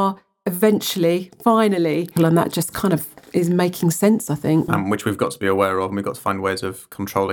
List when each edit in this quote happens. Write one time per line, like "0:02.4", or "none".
0:02.2
0:04.7